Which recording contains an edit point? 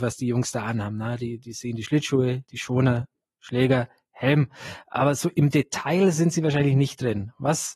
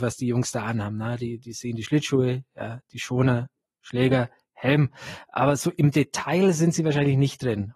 first; 1 cut; at 2.4 s

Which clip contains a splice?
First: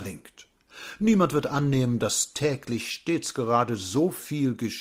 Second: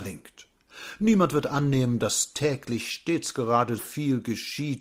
second; 1 cut; at 3.8 s

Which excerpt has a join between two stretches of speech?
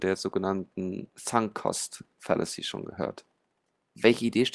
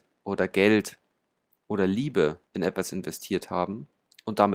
second; 1 cut; at 2.5 s

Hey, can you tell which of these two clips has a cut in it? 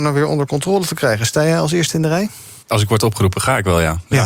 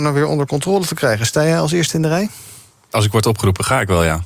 first; 1 cut; at 2.6 s

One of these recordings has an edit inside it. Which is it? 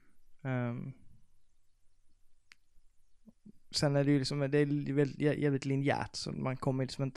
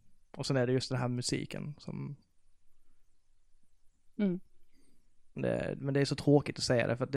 second; 2 cuts; at 4.1 s, 5.4 s

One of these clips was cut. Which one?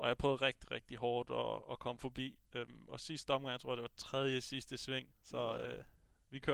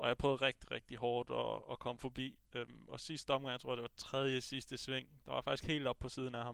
first; 1 cut; at 5.1 s

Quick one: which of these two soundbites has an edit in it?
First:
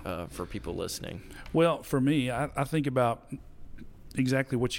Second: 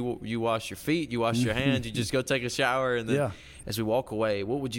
second; 1 cut; at 3.6 s

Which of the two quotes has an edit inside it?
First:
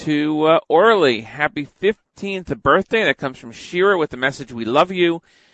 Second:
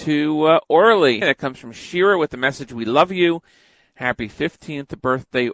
second; 1 cut; at 1.2 s

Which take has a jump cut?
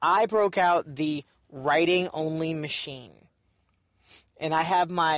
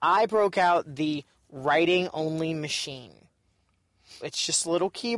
second; 1 cut; at 4.2 s

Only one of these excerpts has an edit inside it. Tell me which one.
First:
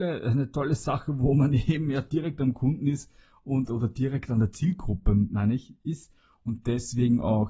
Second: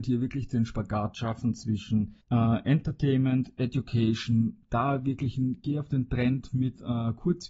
second; 1 cut; at 2.2 s

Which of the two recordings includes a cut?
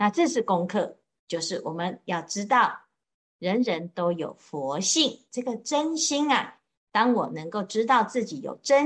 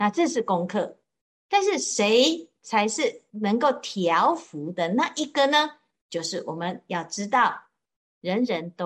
first; 1 cut; at 1.2 s

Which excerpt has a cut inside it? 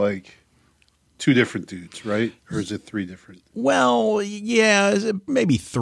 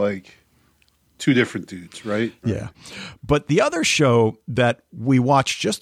second; 1 cut; at 2.4 s

